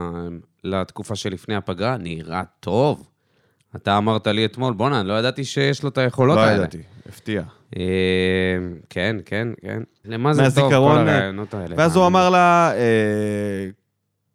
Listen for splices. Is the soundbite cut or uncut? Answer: cut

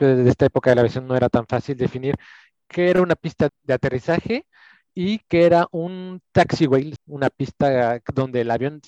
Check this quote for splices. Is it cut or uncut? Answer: cut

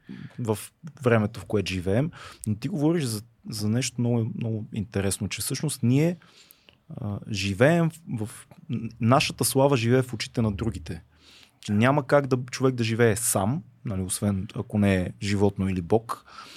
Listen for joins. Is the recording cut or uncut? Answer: uncut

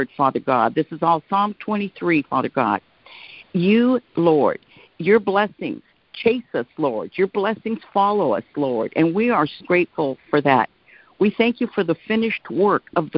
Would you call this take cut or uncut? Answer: cut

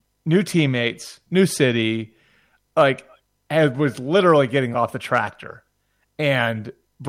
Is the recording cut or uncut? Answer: cut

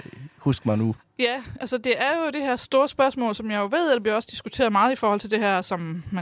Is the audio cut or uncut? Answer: uncut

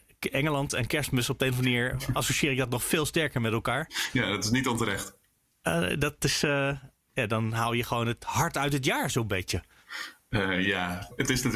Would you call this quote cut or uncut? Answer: uncut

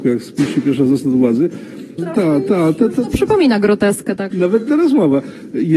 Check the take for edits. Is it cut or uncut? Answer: cut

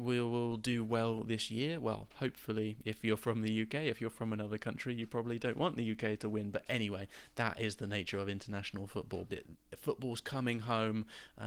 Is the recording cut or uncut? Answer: cut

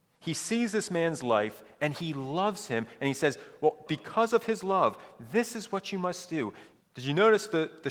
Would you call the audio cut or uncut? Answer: cut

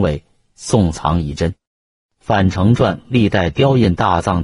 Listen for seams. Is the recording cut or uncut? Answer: uncut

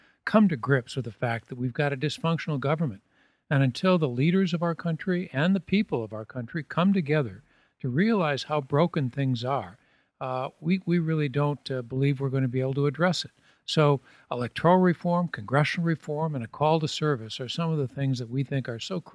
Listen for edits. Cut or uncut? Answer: uncut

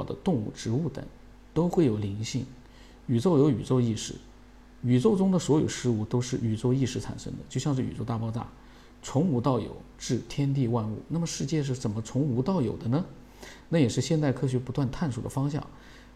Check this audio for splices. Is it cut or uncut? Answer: uncut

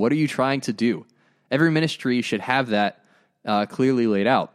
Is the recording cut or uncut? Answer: uncut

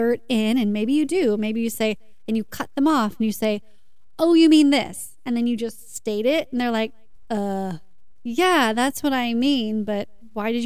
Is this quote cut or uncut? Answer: uncut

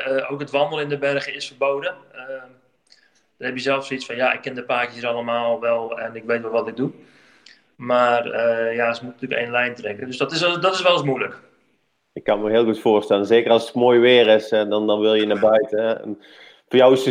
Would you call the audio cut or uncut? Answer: uncut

